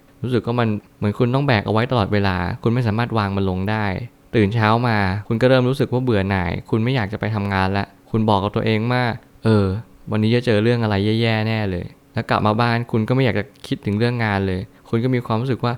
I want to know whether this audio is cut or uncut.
uncut